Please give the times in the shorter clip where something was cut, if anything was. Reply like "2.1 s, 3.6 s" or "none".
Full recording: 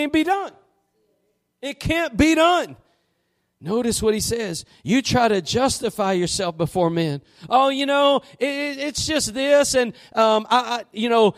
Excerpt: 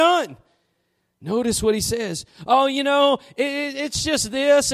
2.3 s